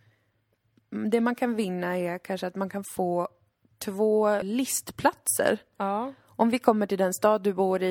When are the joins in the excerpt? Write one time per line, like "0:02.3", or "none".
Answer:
0:04.4